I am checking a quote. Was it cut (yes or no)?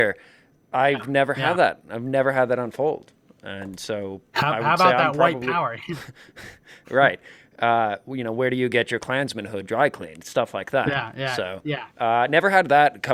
no